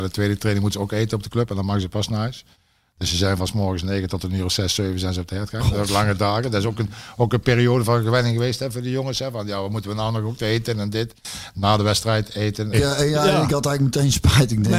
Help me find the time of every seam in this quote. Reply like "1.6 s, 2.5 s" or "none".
12.7 s